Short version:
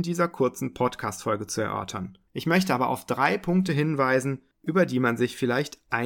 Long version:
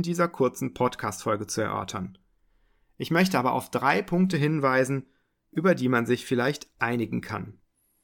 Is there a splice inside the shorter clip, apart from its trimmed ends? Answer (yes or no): yes